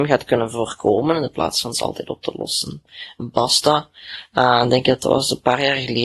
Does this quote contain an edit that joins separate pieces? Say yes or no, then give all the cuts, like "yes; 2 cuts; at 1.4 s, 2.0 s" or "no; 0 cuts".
yes; 1 cut; at 3.2 s